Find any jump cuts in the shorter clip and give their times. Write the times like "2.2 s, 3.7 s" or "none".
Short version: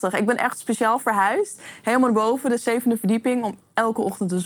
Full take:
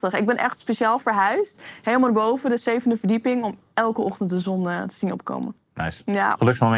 none